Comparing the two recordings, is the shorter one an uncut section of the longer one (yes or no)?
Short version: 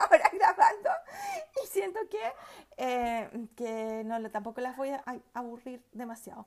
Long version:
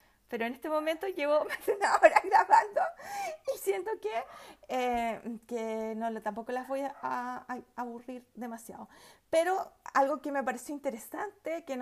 no